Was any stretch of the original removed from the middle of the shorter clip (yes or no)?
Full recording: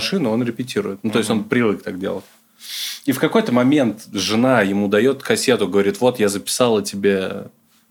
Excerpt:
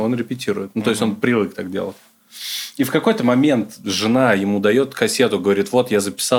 no